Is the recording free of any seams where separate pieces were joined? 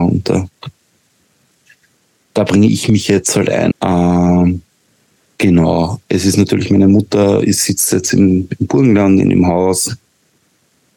no; 1 cut; at 3.7 s

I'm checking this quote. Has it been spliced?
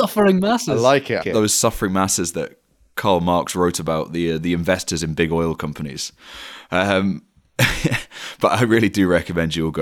yes; 1 cut; at 1.2 s

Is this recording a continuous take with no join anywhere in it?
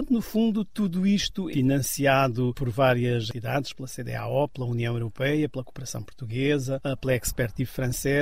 no; 1 cut; at 1.5 s

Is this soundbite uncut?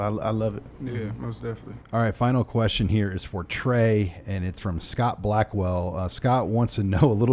yes; 0 cuts

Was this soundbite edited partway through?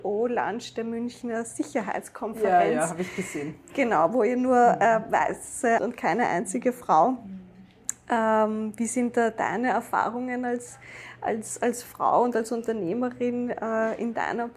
yes; 1 cut; at 5.8 s

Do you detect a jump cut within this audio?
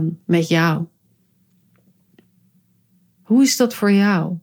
yes; 1 cut; at 3.1 s

